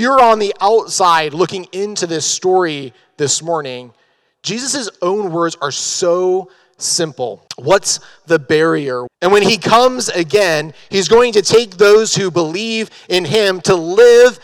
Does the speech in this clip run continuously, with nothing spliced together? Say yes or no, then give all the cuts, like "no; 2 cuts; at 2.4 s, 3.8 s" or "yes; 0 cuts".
no; 2 cuts; at 7.5 s, 9.1 s